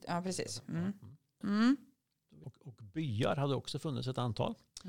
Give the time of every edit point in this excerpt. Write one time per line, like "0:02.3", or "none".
0:01.4
0:02.4